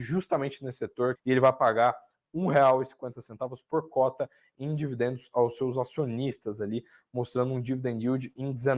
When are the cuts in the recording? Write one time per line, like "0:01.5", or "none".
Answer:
0:01.2